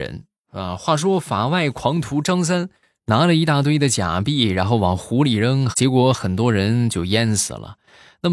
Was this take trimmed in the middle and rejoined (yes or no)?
yes